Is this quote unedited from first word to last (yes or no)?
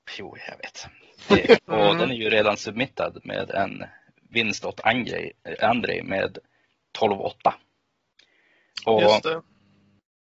no